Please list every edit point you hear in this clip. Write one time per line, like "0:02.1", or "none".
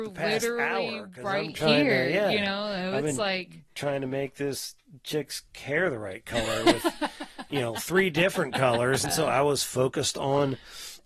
0:09.0